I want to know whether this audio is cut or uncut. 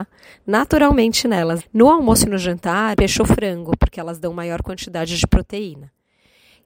cut